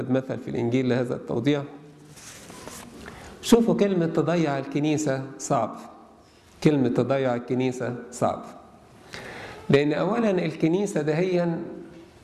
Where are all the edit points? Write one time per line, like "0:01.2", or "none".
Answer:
none